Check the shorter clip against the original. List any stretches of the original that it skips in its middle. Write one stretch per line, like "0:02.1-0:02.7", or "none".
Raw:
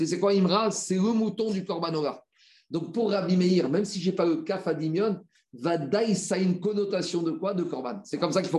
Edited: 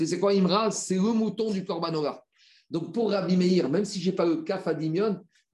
none